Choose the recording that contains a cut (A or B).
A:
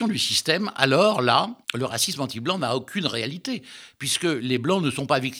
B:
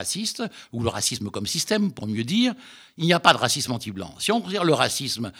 A